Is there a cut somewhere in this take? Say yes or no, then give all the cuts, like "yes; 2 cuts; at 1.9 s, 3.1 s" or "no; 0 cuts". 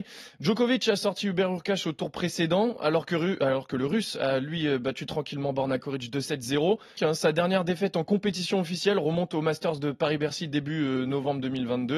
yes; 1 cut; at 7.0 s